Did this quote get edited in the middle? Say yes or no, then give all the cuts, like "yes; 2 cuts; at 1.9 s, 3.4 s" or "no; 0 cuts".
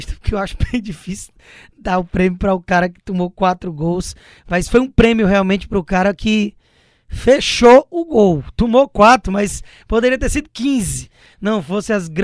no; 0 cuts